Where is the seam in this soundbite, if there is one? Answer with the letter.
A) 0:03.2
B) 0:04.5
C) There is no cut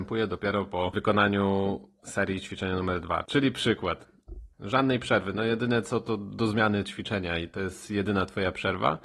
B